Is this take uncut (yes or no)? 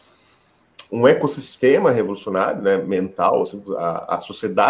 yes